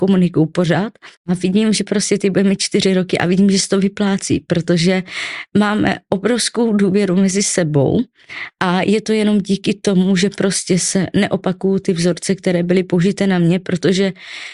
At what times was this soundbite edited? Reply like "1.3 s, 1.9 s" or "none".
1.2 s